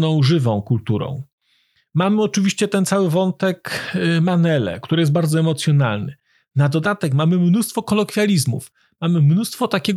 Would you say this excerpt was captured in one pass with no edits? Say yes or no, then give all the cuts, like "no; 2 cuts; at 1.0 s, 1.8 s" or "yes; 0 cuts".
yes; 0 cuts